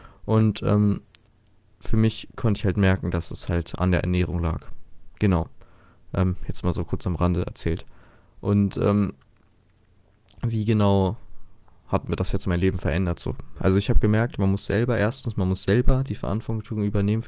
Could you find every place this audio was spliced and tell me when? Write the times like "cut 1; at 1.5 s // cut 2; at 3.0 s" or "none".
none